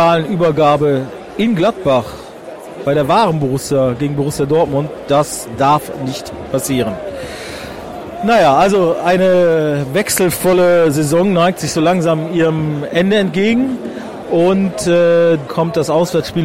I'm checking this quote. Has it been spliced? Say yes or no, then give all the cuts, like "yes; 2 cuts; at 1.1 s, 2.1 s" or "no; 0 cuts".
yes; 2 cuts; at 14.2 s, 15.5 s